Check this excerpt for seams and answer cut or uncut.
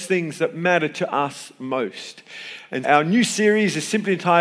cut